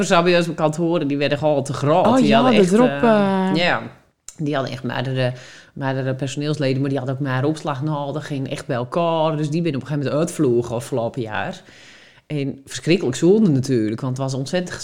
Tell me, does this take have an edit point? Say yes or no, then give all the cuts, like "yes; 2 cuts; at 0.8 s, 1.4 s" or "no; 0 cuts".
no; 0 cuts